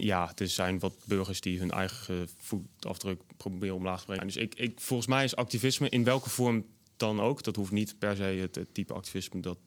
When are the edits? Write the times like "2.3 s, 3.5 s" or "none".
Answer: 4.2 s